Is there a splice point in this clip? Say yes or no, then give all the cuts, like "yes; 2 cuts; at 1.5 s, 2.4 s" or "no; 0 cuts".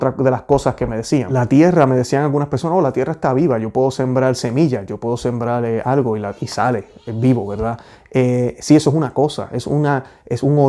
no; 0 cuts